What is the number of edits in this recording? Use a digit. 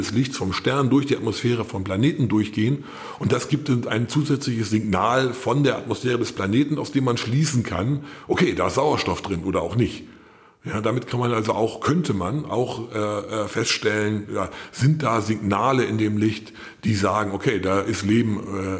0